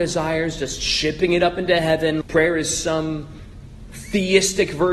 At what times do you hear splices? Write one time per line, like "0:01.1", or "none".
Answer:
0:02.2